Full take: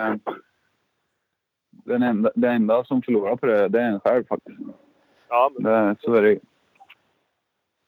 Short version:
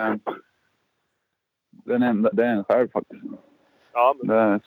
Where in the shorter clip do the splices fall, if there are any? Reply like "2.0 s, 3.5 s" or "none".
2.3 s